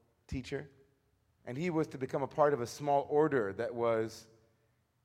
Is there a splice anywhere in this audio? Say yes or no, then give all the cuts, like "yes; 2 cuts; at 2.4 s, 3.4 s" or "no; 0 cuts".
yes; 1 cut; at 1.4 s